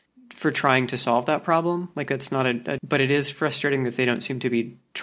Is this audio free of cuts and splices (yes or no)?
no